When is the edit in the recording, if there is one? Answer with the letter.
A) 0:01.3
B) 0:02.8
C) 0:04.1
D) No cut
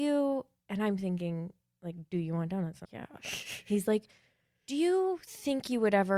B